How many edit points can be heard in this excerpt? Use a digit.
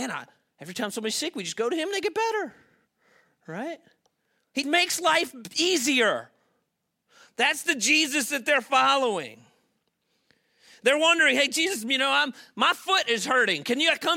1